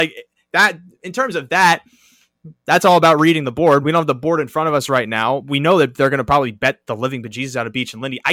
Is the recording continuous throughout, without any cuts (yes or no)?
yes